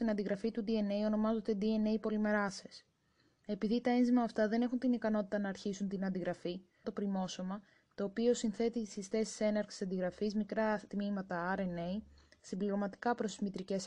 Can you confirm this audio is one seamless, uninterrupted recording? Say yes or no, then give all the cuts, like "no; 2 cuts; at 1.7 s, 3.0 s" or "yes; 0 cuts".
no; 1 cut; at 6.8 s